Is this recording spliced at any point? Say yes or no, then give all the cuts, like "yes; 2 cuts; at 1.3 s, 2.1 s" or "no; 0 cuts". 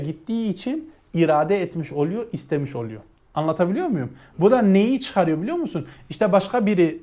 no; 0 cuts